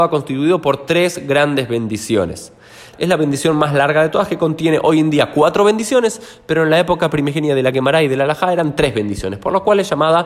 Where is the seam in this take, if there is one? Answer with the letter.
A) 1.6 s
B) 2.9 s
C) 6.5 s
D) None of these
B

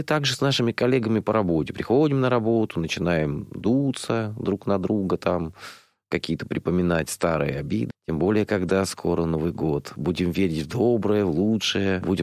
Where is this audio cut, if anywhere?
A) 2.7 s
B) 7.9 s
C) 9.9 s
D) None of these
B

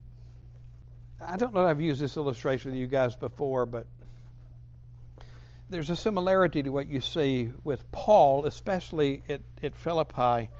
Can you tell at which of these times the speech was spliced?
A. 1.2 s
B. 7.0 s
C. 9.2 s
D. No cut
A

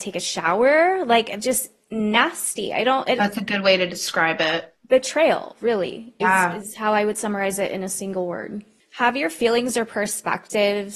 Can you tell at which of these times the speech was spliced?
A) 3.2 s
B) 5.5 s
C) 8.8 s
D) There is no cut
A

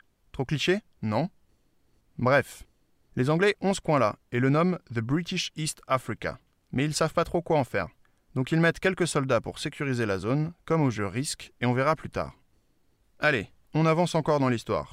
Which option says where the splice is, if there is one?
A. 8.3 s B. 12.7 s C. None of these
C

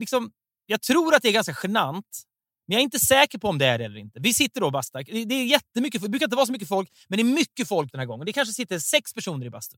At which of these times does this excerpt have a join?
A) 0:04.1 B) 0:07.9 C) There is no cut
B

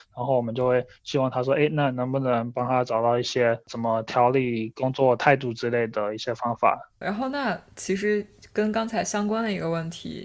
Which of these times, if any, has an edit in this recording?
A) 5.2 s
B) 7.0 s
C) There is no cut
B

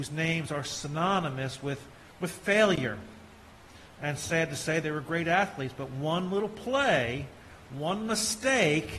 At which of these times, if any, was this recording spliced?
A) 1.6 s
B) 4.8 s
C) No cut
B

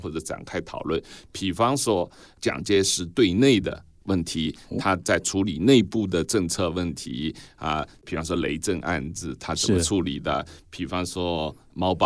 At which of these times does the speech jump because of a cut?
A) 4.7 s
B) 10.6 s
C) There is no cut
C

